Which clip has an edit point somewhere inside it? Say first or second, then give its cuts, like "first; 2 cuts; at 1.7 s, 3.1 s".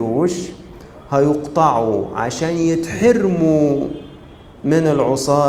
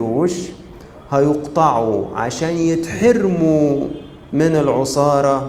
second; 1 cut; at 4.3 s